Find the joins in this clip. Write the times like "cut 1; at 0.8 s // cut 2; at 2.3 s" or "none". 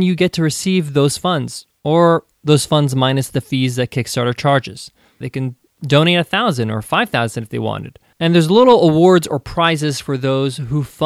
cut 1; at 5.2 s